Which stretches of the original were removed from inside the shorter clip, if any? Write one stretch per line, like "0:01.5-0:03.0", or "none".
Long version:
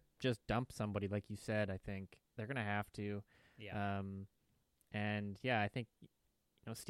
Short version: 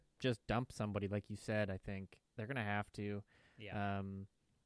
none